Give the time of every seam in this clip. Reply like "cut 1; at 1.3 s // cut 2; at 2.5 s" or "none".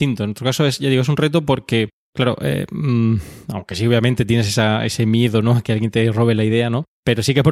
none